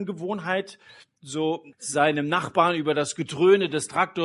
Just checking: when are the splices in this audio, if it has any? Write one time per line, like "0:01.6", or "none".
0:01.7

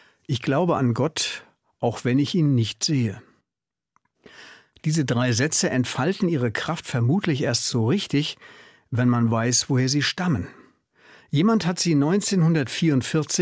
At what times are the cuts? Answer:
none

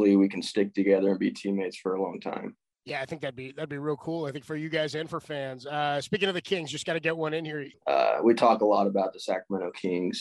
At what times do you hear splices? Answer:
0:07.7

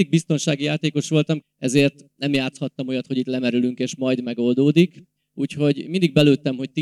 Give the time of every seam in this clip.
0:01.4

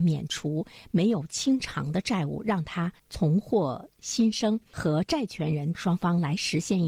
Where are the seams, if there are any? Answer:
0:03.0

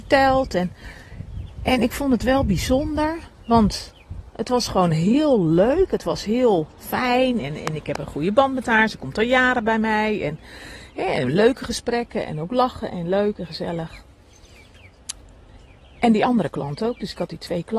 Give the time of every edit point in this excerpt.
0:06.7

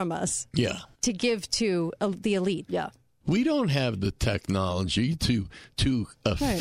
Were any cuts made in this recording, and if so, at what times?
0:00.9
0:02.7

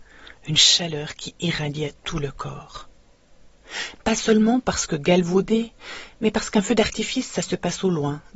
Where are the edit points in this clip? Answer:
0:04.0

